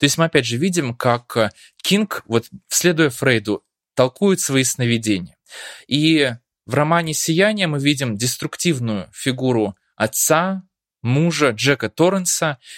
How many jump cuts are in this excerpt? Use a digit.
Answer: 0